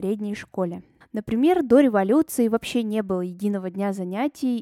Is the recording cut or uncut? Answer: cut